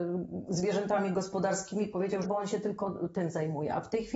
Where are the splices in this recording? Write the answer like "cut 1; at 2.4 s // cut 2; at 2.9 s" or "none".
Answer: cut 1; at 2.2 s